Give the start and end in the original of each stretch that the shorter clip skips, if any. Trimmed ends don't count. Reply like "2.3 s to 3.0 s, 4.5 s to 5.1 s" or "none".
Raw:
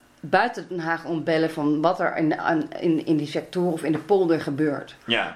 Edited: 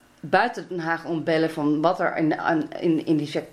none